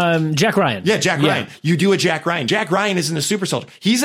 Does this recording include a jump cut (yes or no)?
no